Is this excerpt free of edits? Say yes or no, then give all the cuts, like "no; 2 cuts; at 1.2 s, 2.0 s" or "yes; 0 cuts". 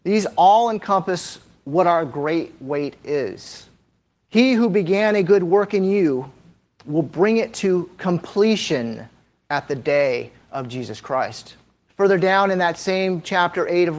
no; 2 cuts; at 4.2 s, 11.9 s